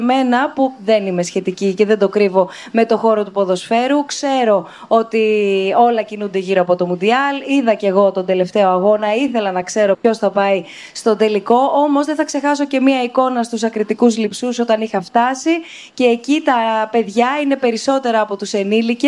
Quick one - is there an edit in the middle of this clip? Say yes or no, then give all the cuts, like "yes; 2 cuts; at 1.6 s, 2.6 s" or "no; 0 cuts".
no; 0 cuts